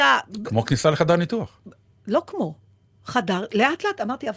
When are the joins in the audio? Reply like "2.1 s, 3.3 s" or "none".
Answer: none

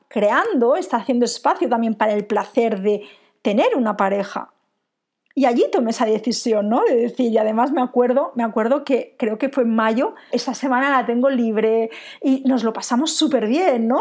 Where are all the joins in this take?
10.3 s

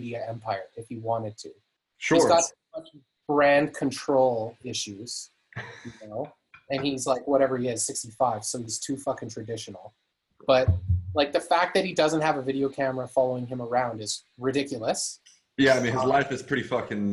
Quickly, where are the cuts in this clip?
none

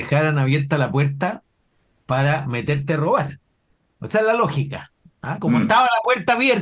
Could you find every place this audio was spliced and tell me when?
none

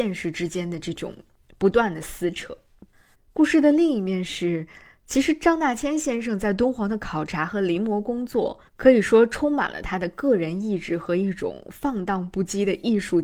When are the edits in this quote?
3.1 s, 8.7 s

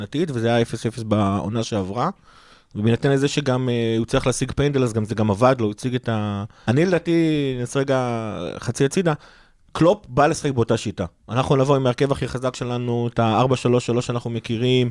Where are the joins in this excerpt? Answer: 6.6 s

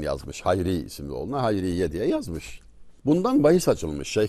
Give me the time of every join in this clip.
3.0 s

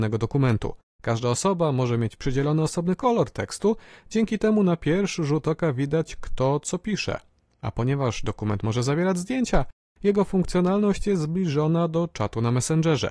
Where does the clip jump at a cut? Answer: none

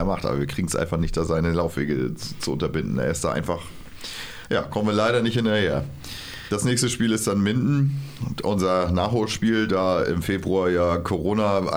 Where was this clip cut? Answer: none

